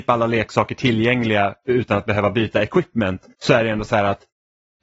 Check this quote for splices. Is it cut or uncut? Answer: cut